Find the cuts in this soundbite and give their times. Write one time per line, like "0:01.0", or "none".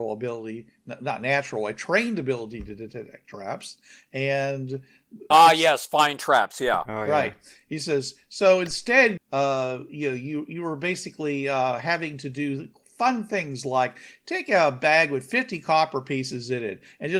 0:05.3
0:09.2